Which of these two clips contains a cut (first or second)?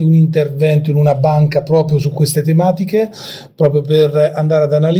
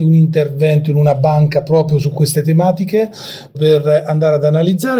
second